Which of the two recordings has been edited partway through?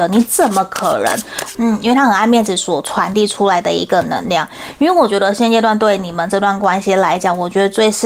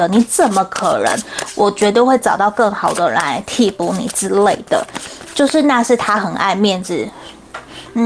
first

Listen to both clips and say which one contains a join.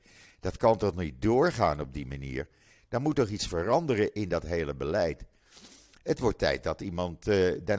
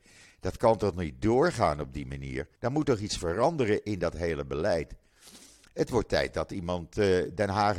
second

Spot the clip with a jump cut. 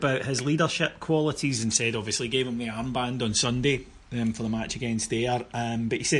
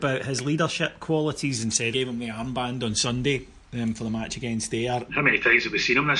second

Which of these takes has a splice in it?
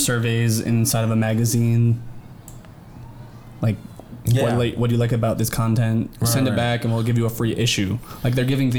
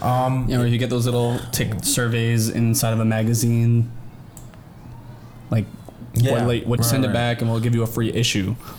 second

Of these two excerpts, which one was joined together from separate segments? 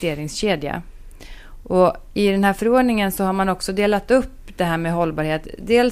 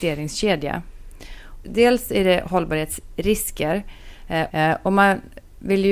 second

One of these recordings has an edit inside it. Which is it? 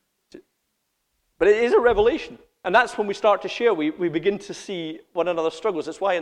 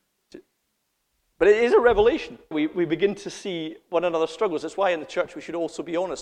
second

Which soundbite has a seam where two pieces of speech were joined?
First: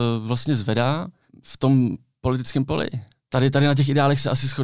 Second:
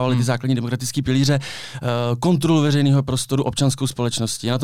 first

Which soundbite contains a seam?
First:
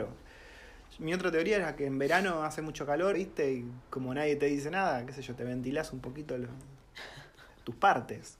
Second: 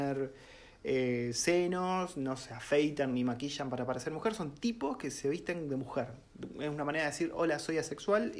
first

